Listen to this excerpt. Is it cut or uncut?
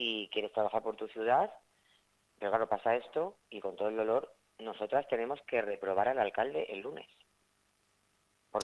uncut